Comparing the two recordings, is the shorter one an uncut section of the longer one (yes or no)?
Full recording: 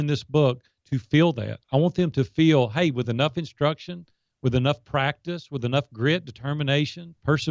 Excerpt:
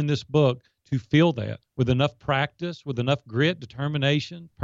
no